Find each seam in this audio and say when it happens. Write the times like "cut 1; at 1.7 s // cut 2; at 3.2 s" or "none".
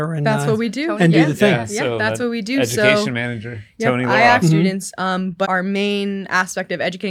cut 1; at 4.4 s // cut 2; at 5.4 s